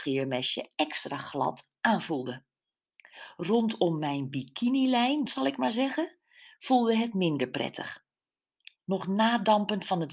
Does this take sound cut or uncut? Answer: cut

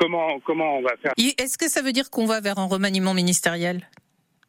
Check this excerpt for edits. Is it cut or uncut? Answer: cut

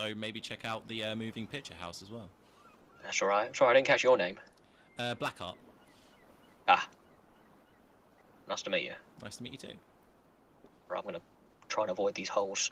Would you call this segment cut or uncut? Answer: uncut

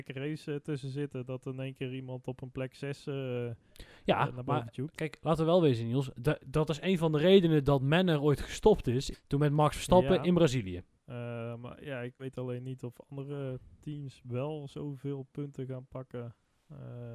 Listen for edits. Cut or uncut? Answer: cut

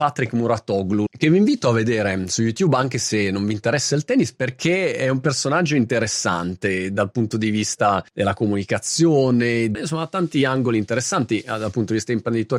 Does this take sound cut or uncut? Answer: cut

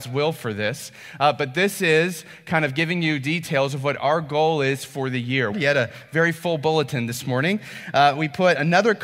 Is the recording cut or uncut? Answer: cut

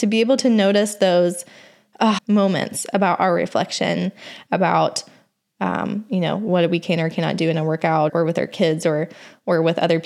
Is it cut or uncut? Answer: cut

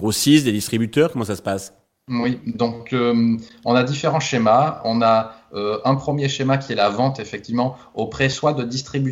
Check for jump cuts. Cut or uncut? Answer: uncut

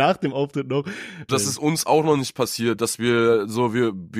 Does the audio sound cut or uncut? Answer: cut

